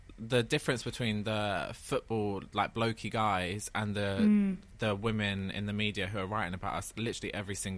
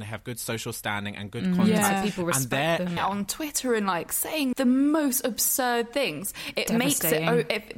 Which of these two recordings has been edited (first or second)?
second